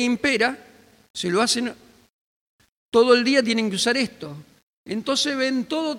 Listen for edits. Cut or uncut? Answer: uncut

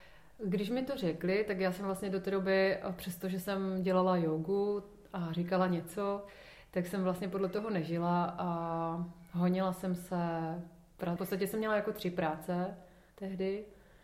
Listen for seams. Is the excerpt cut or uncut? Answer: cut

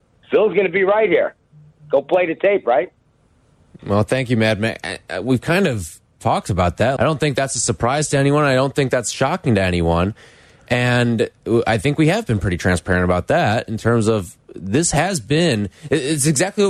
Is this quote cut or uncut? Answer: cut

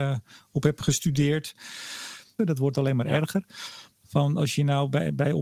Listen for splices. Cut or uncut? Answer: cut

